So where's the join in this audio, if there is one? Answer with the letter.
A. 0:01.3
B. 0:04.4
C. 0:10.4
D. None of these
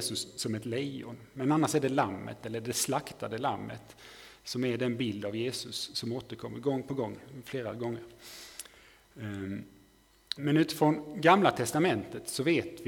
C